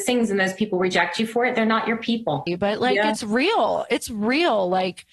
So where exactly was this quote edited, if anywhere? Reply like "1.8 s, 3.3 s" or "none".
2.5 s